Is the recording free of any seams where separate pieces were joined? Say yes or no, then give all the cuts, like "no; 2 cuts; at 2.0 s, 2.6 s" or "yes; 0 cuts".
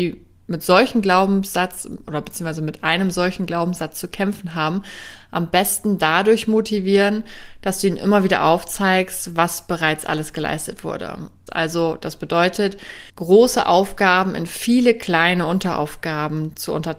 no; 2 cuts; at 11.5 s, 13.1 s